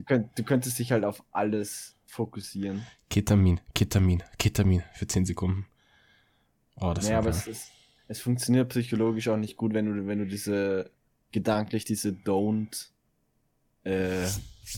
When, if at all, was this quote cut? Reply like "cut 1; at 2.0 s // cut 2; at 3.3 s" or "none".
none